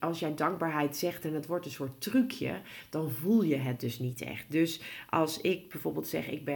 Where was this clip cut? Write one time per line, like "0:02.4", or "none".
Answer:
none